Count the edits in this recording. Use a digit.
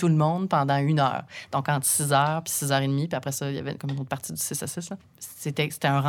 0